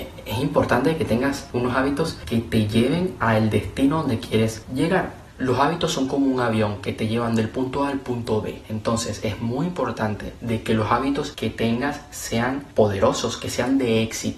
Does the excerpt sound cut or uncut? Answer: uncut